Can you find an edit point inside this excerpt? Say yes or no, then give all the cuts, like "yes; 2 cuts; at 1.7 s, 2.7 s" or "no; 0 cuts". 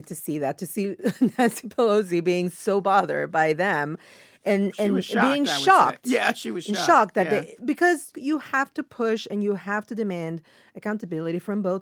no; 0 cuts